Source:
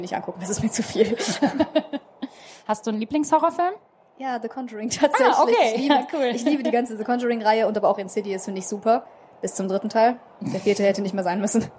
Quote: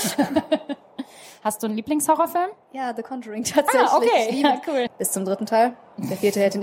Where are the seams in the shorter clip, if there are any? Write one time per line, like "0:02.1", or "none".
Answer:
0:02.6
0:04.9